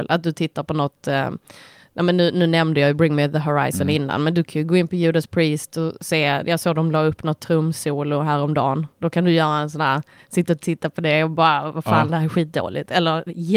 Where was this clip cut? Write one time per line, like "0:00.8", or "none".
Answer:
none